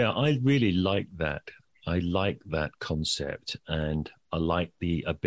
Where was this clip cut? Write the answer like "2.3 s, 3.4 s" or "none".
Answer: none

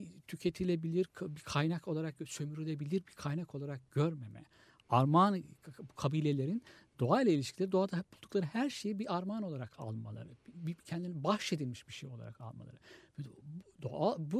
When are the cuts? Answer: none

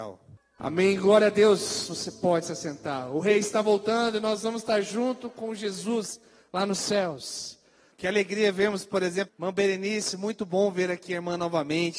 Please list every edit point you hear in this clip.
7.9 s, 9.3 s

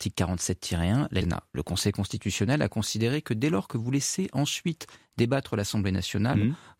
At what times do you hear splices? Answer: 1.2 s

